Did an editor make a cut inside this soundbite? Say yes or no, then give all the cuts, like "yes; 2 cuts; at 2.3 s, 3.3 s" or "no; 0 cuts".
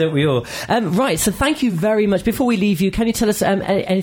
no; 0 cuts